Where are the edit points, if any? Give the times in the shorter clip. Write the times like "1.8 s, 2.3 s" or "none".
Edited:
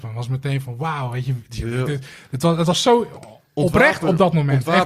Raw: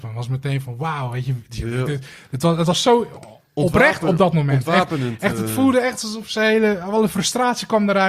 none